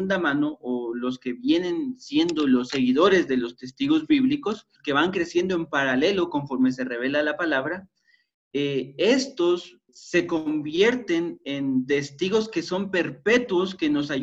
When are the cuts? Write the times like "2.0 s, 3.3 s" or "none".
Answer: 4.8 s, 9.9 s